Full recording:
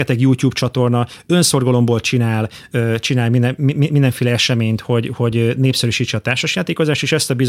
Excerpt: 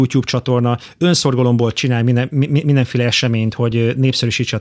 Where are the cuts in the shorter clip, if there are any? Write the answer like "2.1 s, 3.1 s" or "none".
1.7 s, 3.6 s